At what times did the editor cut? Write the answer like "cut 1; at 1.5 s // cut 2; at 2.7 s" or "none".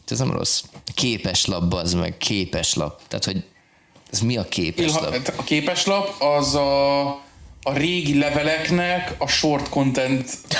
none